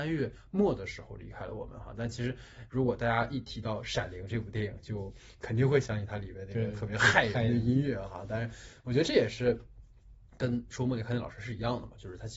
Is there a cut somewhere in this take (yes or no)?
no